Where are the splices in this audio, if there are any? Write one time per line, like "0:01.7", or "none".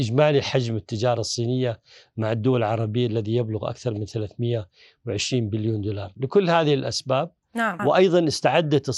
0:07.8